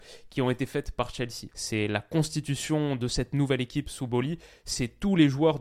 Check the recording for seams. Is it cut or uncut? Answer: cut